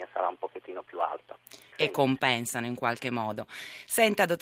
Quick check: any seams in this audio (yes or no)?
yes